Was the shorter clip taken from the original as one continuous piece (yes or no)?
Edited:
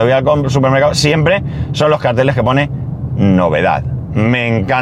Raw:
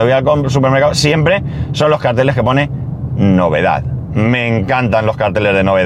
yes